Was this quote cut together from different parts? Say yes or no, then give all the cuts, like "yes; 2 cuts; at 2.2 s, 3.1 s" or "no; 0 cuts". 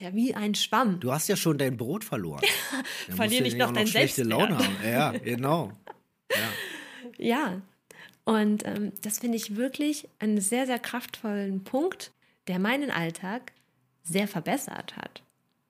no; 0 cuts